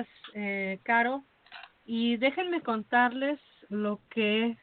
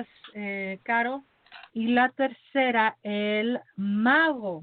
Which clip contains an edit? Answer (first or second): second